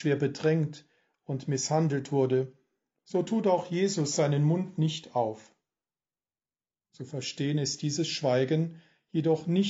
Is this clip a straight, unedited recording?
yes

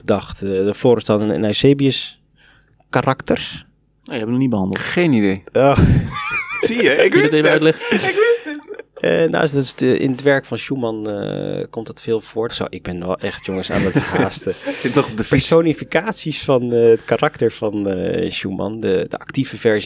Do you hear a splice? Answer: yes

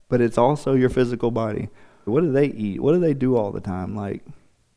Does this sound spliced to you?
yes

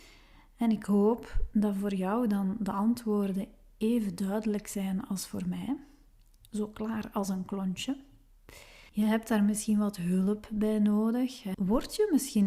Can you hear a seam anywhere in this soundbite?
yes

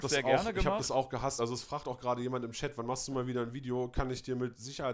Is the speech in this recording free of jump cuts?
yes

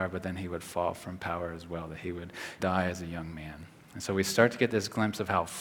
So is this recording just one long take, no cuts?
no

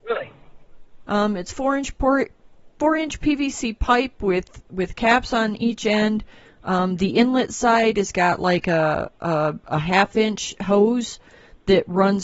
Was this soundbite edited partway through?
yes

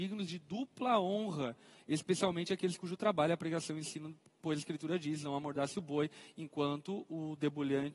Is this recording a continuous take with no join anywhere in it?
yes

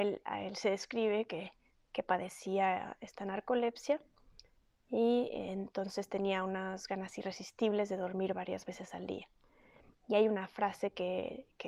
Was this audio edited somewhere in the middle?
no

